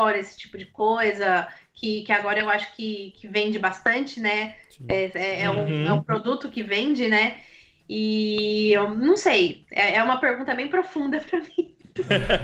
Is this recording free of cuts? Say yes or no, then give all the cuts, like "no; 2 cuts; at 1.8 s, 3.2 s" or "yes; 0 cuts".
yes; 0 cuts